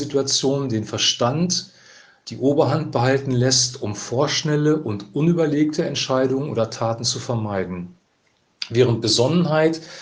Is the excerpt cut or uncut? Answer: uncut